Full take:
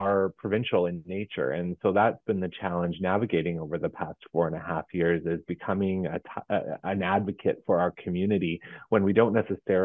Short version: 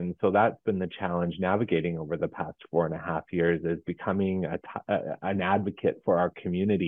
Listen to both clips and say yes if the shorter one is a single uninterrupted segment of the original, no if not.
yes